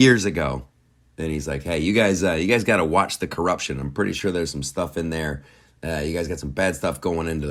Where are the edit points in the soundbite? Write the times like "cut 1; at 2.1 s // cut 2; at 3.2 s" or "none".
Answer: none